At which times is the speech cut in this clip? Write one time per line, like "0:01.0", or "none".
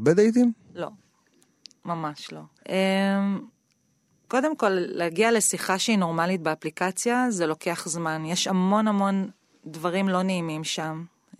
0:02.6